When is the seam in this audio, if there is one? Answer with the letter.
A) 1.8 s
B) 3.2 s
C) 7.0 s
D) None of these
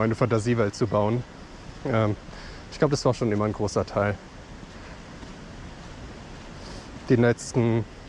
D